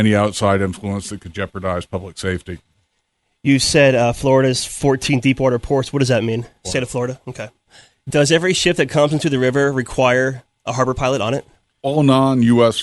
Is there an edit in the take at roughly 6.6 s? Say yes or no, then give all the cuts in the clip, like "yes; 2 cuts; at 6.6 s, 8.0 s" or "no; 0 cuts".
yes; 1 cut; at 6.6 s